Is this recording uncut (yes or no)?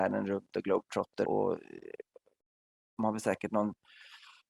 no